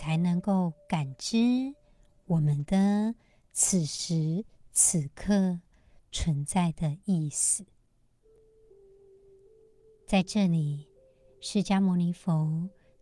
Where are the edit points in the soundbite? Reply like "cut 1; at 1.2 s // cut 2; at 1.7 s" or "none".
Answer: none